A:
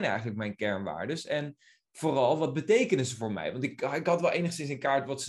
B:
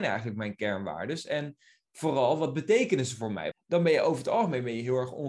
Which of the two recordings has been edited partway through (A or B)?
B